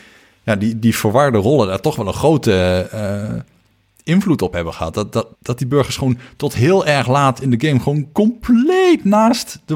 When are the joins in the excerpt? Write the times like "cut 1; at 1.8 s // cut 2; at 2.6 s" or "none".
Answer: cut 1; at 5.3 s